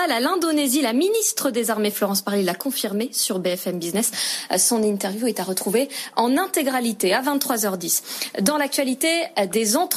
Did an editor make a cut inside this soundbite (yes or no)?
no